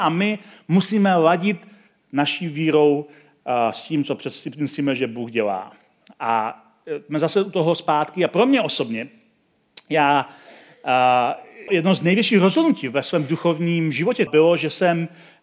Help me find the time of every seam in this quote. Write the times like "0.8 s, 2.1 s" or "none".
11.7 s, 14.3 s